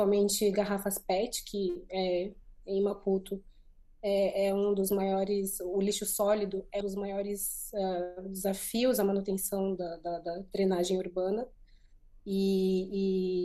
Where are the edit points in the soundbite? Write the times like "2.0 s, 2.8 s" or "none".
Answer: 6.8 s